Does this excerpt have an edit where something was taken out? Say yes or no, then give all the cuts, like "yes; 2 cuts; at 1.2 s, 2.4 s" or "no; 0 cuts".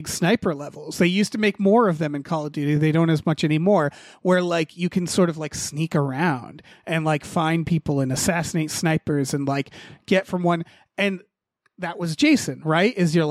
no; 0 cuts